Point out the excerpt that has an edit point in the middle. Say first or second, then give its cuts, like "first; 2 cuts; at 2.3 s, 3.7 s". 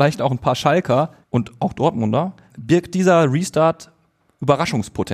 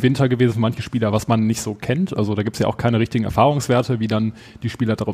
first; 2 cuts; at 1.2 s, 2.5 s